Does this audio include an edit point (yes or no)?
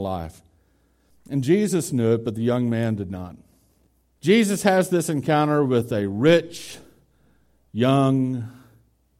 yes